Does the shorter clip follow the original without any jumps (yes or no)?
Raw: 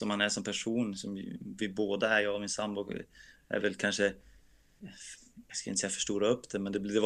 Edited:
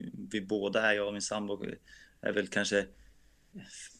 yes